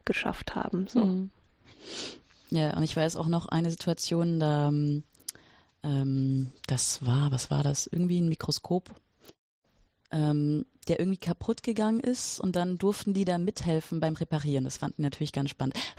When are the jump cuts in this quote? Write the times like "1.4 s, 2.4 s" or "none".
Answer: none